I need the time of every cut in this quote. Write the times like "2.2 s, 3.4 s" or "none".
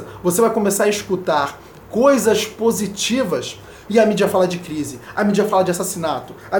3.9 s